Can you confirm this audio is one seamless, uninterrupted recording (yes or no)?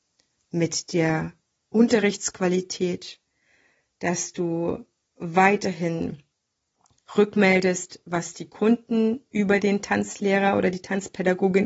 yes